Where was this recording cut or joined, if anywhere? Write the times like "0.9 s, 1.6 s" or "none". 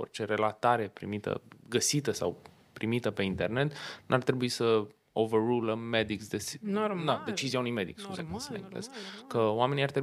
none